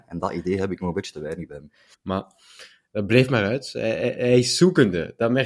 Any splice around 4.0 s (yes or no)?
no